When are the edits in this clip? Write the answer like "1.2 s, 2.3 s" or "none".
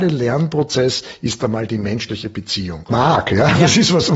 2.9 s